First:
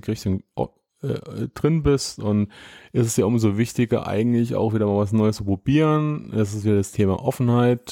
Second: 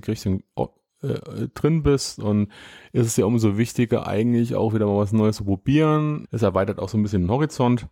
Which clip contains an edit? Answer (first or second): second